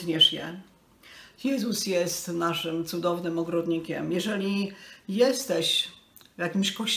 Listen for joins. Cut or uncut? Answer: uncut